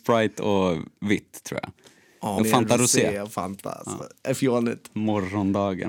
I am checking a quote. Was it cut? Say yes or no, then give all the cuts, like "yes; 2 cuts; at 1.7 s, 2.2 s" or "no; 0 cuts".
yes; 1 cut; at 2.4 s